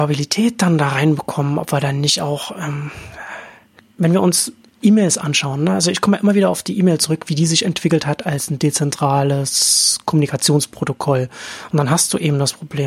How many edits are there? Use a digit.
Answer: 0